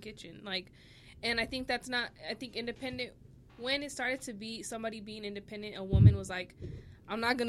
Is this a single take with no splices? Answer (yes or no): yes